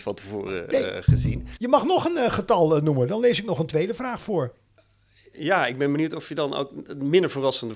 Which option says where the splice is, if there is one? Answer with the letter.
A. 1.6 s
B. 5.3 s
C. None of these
A